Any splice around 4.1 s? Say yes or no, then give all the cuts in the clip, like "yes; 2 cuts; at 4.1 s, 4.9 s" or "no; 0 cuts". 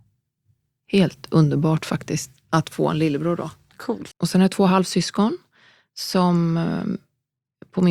yes; 1 cut; at 4.1 s